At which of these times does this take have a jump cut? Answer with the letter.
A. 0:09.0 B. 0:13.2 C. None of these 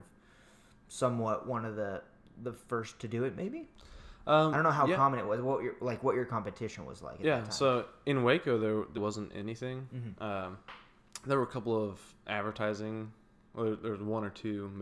A